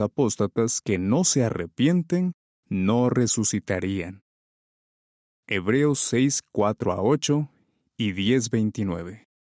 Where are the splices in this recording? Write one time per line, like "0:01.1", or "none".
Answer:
none